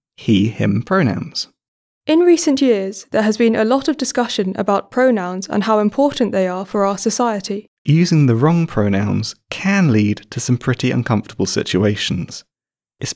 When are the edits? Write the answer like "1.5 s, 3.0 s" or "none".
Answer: 2.0 s, 7.8 s